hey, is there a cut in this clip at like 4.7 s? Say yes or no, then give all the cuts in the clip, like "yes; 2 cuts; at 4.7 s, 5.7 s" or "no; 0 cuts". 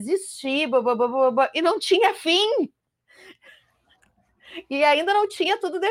no; 0 cuts